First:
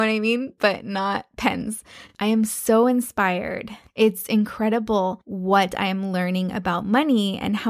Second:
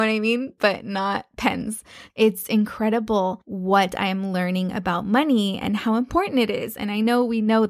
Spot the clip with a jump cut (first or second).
second